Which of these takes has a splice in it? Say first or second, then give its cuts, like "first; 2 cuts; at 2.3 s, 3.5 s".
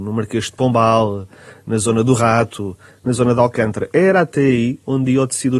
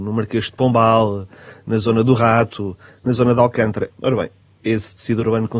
second; 1 cut; at 3.9 s